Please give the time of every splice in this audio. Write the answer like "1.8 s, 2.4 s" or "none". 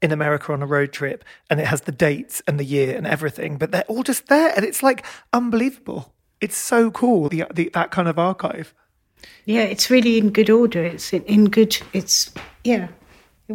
7.3 s

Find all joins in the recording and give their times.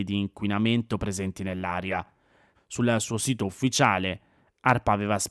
2.5 s

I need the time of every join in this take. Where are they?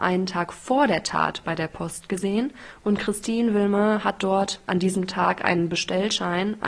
none

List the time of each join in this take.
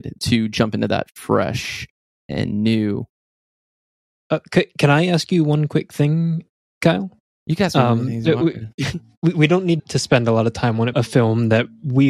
9.8 s, 10.9 s

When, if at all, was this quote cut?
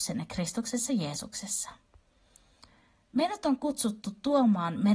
none

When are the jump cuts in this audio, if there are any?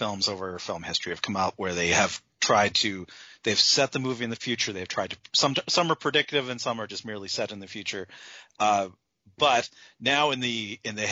none

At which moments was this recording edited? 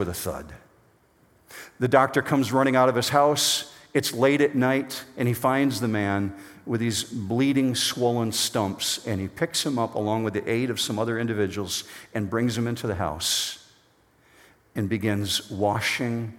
none

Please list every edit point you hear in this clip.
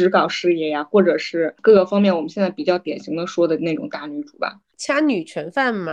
4.7 s

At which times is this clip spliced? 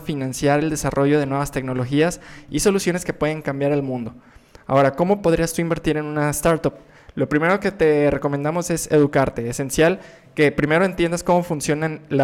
none

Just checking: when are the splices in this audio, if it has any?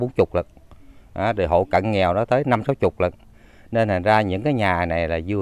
none

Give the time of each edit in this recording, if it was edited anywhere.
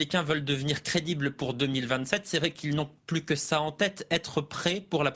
none

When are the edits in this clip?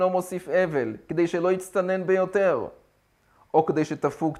none

